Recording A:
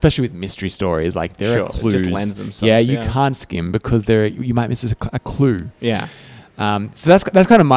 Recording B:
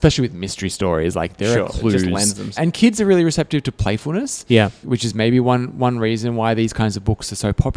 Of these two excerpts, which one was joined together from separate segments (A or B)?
B